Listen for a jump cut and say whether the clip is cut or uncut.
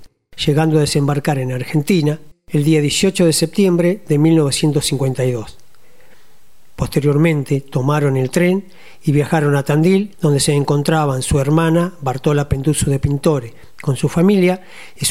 cut